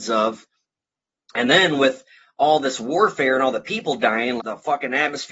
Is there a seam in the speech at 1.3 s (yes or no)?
no